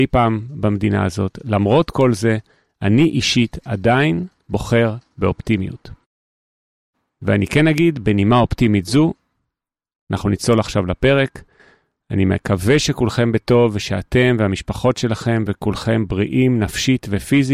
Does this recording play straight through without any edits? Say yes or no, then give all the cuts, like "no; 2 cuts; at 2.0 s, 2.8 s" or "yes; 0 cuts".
yes; 0 cuts